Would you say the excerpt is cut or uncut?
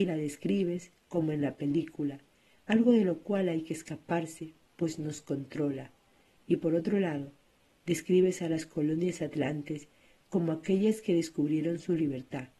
uncut